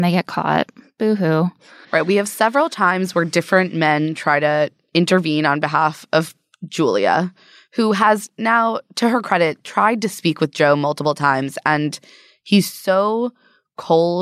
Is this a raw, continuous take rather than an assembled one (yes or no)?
no